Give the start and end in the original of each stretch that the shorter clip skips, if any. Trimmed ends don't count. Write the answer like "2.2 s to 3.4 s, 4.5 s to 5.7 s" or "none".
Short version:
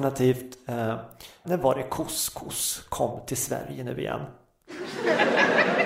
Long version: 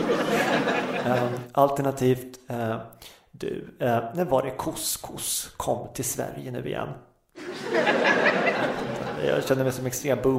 3.3 s to 4.1 s